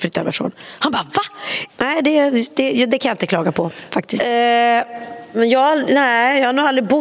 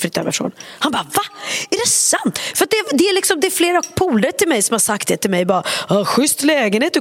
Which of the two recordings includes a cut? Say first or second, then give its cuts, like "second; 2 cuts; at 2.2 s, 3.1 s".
first; 3 cuts; at 1.7 s, 4.2 s, 5.3 s